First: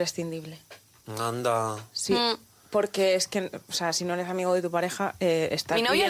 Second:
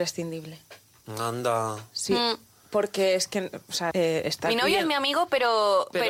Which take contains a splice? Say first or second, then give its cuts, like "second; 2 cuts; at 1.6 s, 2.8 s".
second; 1 cut; at 3.9 s